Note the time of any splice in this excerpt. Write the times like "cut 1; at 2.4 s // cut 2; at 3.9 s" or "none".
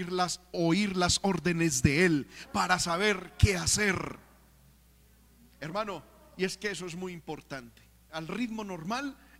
cut 1; at 8.1 s